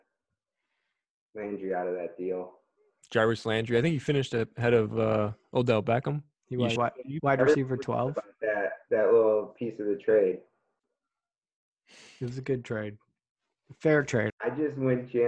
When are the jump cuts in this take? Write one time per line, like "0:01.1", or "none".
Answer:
0:06.8
0:14.3